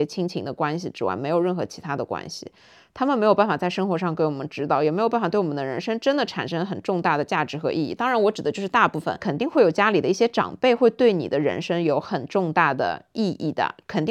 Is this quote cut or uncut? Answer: uncut